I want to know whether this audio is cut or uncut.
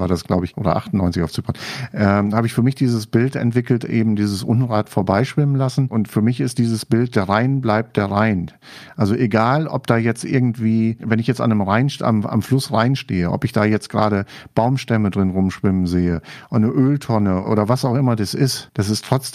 uncut